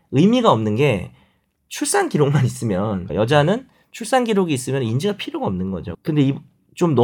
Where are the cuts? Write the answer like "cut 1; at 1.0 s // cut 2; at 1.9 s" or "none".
cut 1; at 3.1 s // cut 2; at 5.9 s